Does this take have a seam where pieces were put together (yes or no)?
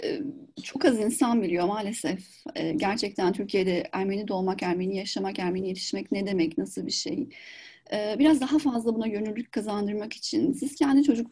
no